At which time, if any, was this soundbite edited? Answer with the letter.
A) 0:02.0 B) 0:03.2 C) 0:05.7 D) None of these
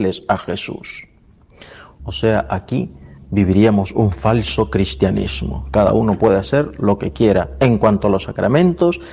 A